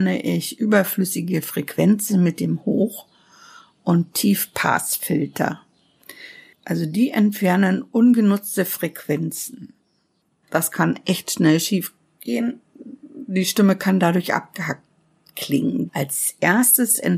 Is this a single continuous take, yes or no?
no